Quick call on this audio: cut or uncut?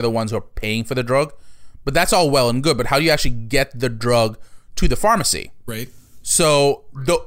uncut